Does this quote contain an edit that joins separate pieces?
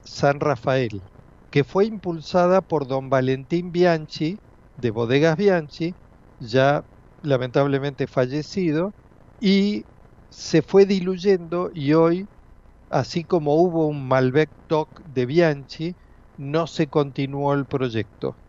no; 0 cuts

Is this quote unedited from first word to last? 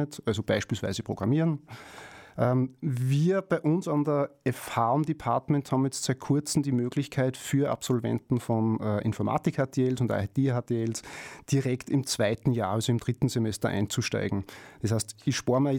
yes; 0 cuts

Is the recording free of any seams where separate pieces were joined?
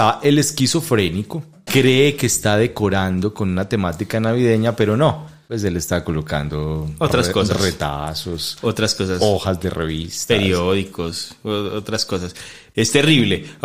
yes; 0 cuts

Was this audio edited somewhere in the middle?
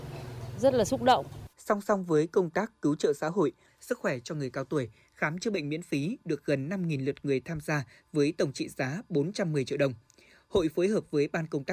yes; 2 cuts; at 1.5 s, 3.7 s

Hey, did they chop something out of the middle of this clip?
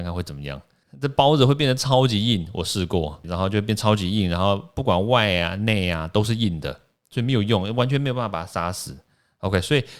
yes; 1 cut; at 3.2 s

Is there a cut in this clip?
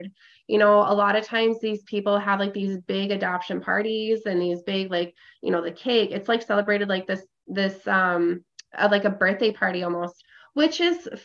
no; 0 cuts

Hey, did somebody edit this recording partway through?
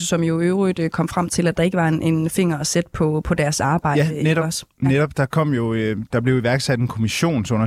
no; 0 cuts

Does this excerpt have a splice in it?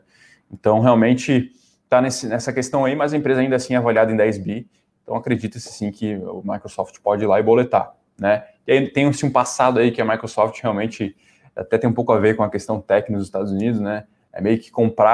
no; 0 cuts

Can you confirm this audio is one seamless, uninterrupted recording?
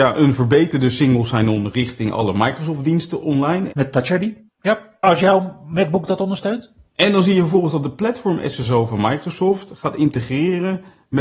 no; 2 cuts; at 3.7 s, 6.9 s

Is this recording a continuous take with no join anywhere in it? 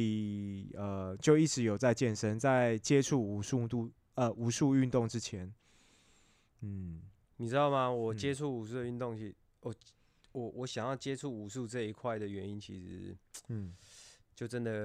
yes; 0 cuts

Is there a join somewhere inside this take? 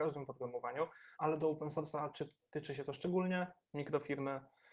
yes; 2 cuts; at 1.1 s, 3.6 s

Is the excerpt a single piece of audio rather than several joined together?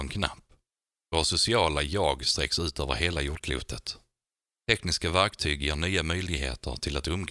yes; 0 cuts

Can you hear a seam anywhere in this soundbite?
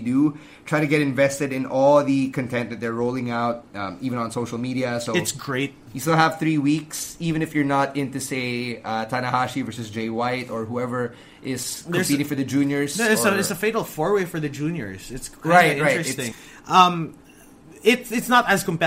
yes; 1 cut; at 16.3 s

